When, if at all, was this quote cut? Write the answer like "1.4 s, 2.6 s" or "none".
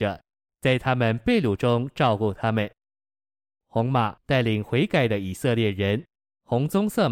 3.6 s